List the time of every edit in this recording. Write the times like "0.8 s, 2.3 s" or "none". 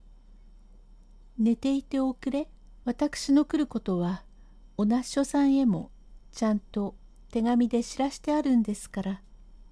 2.8 s